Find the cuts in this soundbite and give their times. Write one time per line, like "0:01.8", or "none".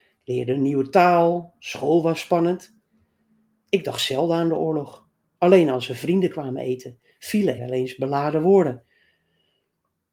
0:07.6